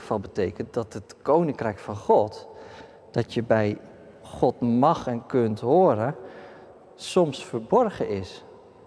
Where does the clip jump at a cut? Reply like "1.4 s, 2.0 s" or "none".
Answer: none